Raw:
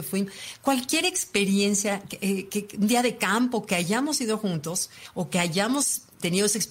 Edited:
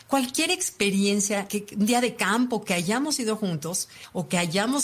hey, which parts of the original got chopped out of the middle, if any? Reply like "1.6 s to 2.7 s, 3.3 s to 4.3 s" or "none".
2.0 s to 2.5 s